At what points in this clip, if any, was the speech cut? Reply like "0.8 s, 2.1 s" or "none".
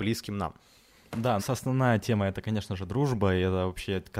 1.4 s